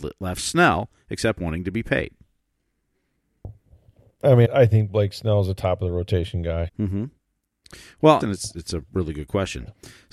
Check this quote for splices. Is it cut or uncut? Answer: cut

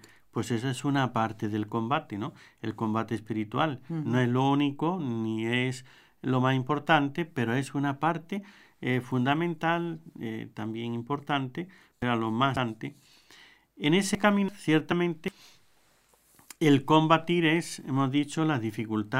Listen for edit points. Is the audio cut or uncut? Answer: uncut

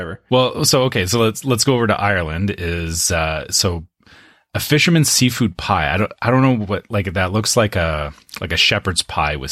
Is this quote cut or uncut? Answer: uncut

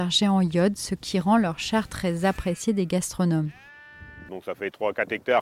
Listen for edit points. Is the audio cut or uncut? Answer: cut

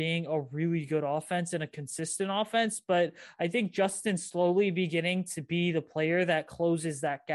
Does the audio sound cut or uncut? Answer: uncut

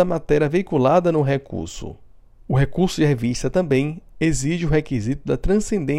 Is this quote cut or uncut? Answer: cut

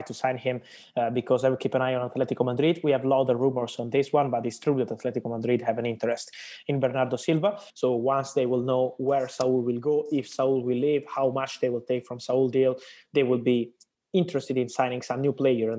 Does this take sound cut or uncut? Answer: cut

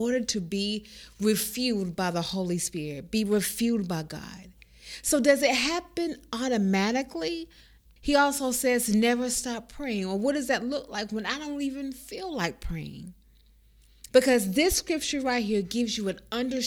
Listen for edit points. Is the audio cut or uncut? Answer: cut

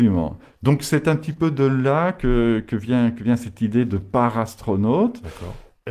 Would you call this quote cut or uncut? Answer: uncut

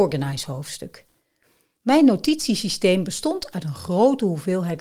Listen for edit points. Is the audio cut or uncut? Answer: uncut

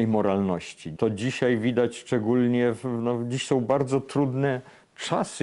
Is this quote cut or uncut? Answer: cut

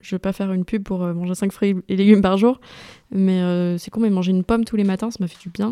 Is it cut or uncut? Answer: uncut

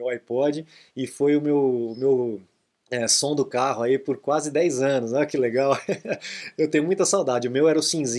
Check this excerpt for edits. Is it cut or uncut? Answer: uncut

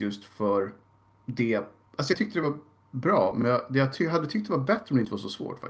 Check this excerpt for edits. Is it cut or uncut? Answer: uncut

